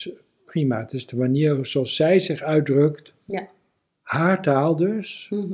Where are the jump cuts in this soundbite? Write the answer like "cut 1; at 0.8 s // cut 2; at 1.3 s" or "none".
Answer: none